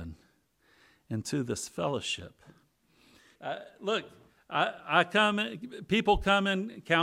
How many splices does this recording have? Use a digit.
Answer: 1